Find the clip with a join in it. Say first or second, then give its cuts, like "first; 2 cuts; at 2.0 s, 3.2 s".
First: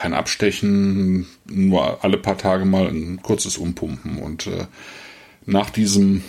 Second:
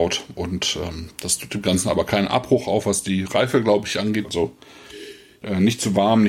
second; 1 cut; at 4.2 s